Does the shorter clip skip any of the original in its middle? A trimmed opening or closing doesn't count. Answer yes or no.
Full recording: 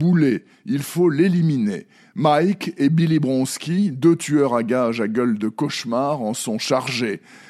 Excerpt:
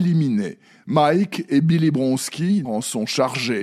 yes